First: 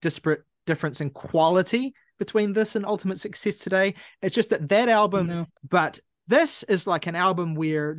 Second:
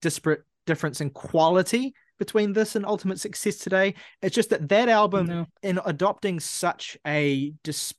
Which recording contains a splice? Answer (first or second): first